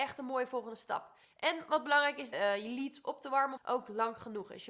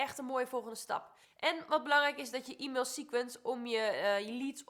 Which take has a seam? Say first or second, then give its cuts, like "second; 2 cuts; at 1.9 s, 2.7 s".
first; 2 cuts; at 2.3 s, 3.6 s